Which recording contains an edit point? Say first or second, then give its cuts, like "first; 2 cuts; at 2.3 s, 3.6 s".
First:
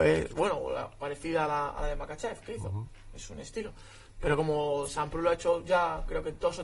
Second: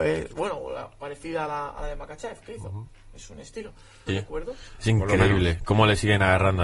second; 1 cut; at 4.1 s